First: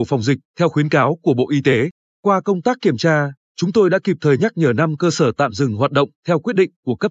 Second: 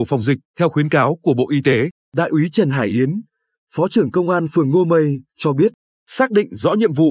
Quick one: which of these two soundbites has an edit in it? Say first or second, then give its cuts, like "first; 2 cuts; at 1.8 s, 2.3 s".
second; 1 cut; at 2.0 s